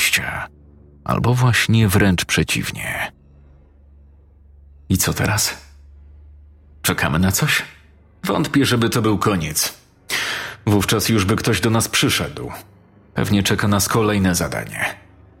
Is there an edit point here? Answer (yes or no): no